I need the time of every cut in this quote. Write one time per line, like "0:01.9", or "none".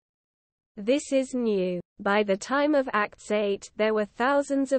0:01.9